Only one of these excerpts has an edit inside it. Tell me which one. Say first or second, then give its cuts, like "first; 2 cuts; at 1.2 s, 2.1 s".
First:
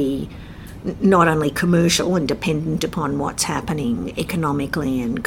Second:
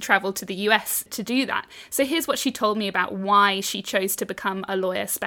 second; 1 cut; at 1.1 s